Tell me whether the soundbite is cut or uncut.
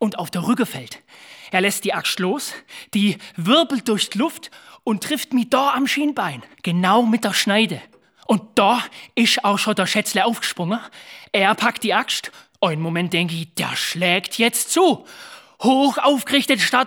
uncut